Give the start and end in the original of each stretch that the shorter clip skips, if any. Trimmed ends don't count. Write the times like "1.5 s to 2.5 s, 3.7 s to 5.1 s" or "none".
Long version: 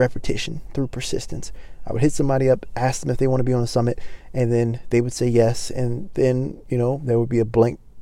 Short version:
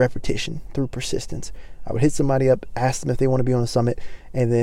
none